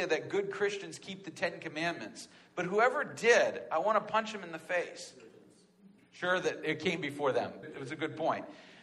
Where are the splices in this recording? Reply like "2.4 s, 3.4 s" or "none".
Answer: 6.0 s, 7.6 s